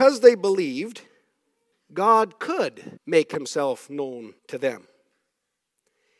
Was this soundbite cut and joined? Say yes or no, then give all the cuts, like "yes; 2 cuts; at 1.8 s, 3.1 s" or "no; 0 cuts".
yes; 3 cuts; at 1.7 s, 3.0 s, 4.4 s